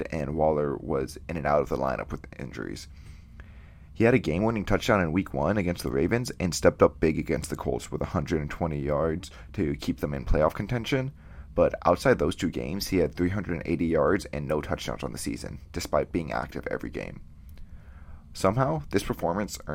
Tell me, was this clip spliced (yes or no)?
no